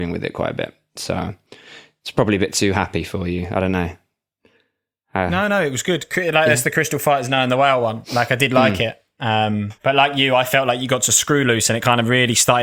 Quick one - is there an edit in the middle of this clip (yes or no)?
yes